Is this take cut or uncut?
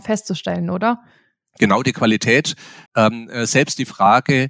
cut